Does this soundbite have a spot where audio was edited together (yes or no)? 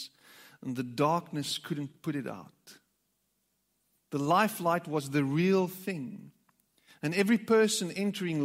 no